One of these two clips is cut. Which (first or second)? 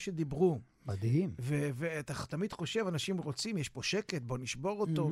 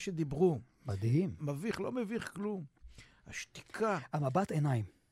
second